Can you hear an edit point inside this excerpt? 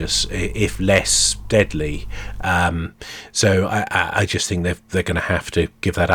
no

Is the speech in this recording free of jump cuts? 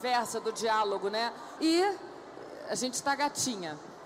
no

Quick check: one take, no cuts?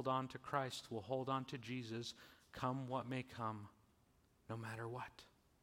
yes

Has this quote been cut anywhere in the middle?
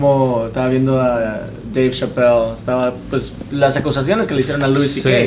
no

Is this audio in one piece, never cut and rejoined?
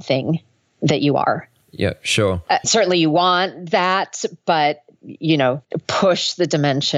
no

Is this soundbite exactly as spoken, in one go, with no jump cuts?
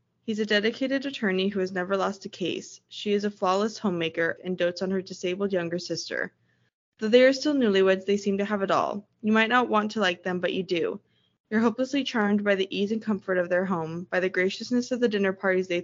no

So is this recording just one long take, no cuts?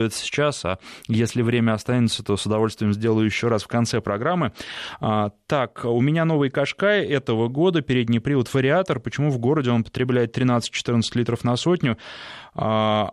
yes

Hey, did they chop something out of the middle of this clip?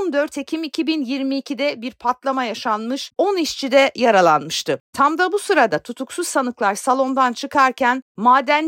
yes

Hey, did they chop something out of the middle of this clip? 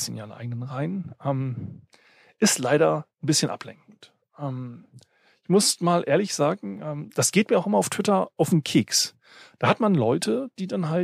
no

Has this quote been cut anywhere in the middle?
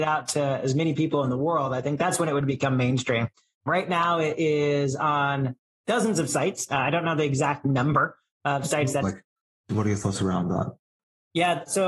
yes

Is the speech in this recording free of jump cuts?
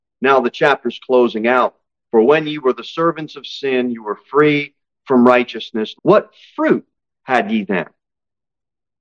no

